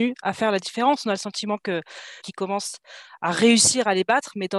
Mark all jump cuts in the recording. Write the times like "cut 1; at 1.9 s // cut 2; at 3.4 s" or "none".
cut 1; at 2.2 s